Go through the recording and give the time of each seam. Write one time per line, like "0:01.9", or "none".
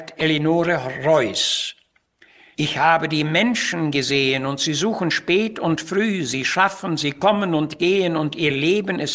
none